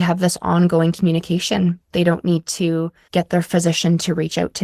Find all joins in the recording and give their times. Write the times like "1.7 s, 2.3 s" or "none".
none